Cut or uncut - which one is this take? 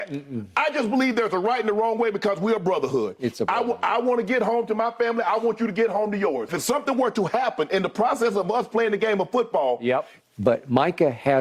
cut